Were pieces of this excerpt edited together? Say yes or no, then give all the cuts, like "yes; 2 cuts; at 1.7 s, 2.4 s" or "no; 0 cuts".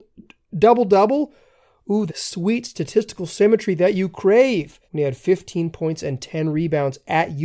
yes; 2 cuts; at 2.1 s, 4.8 s